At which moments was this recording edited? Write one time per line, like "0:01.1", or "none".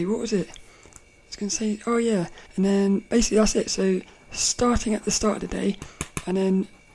0:02.5